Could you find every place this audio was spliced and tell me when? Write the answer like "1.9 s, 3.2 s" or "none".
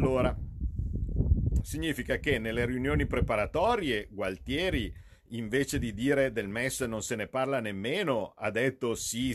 1.6 s